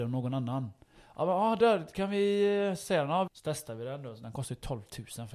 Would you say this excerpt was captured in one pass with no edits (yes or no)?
no